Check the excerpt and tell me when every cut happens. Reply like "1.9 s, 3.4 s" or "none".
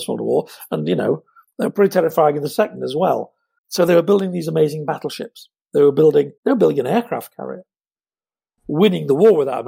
3.6 s, 6.4 s, 8.6 s